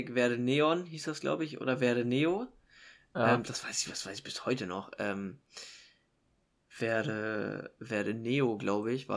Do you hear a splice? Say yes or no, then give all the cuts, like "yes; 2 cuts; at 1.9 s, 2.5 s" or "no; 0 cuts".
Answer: no; 0 cuts